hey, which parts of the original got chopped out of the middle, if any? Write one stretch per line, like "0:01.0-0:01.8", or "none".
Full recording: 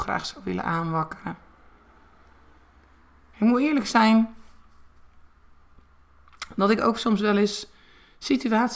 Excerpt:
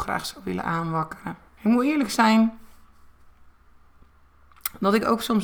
0:01.5-0:03.2